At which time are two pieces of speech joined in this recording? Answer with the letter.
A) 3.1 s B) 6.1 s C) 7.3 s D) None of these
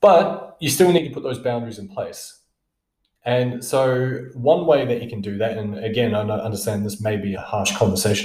C